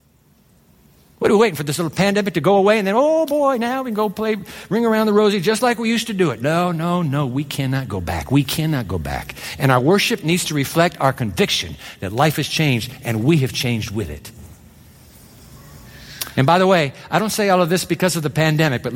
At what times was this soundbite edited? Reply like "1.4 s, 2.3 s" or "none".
none